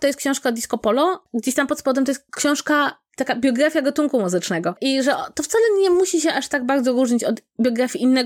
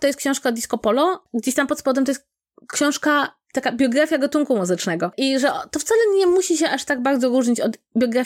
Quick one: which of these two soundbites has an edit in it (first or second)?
first